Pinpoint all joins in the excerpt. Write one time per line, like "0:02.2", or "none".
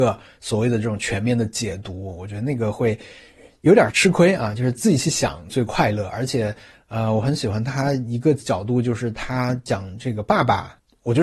0:05.5